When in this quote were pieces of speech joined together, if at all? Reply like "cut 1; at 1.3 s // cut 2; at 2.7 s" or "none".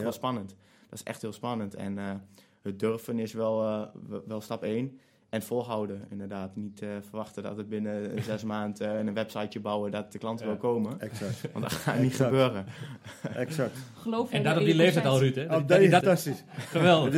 cut 1; at 16.0 s